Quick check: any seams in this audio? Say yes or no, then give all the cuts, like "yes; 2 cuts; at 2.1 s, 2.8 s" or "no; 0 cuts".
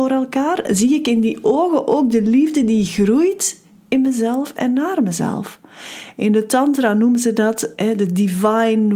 no; 0 cuts